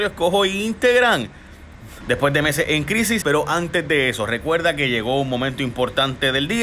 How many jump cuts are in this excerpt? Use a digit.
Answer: 2